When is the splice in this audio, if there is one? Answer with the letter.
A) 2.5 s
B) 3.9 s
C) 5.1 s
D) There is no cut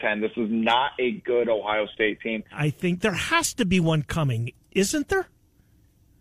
A